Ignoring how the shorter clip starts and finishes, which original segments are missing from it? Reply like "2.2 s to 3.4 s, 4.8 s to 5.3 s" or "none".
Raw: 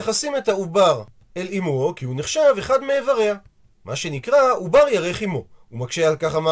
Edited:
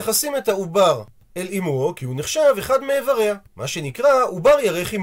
3.5 s to 3.8 s

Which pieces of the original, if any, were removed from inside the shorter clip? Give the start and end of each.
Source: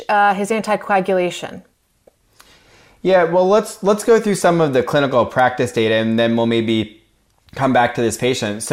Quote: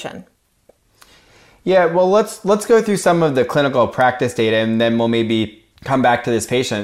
7.1 s to 7.4 s

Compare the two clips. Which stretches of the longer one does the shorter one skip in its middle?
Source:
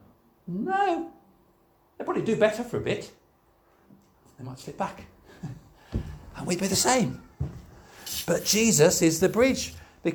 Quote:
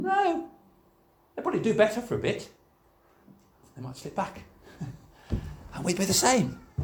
none

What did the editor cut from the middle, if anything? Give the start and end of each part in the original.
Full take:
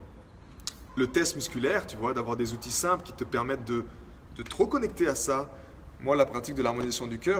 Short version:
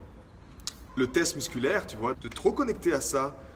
2.1 s to 4.3 s

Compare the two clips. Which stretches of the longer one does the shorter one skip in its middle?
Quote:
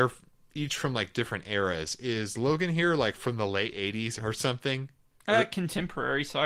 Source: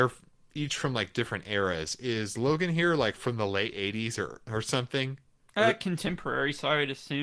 4.2 s to 4.4 s

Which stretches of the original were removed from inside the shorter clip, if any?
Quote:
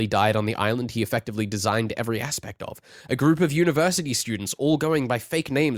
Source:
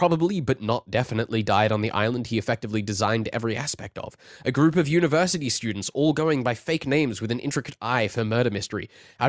none

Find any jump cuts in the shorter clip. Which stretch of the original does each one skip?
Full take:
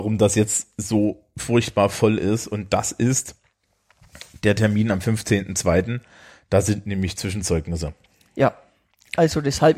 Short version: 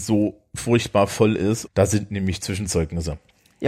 2.5 s to 6.4 s

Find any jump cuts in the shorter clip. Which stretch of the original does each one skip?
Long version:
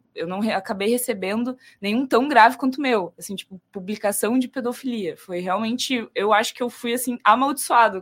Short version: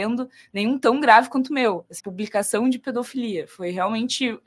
3.3 s to 3.7 s

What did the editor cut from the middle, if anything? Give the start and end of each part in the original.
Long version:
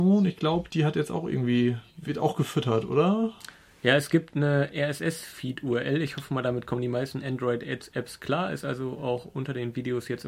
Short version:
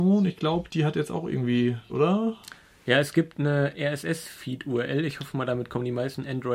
1.9 s to 2.9 s

